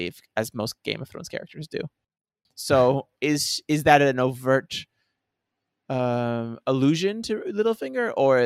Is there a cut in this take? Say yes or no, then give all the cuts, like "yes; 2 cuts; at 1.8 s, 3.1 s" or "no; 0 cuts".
yes; 1 cut; at 2.5 s